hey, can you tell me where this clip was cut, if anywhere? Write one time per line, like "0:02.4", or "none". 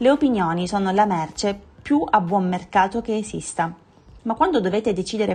0:04.2